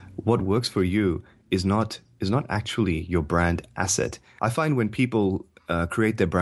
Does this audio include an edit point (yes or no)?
yes